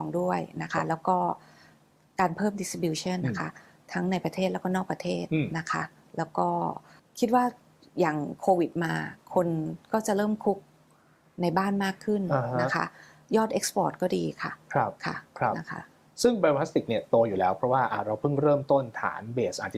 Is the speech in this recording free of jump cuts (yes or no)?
no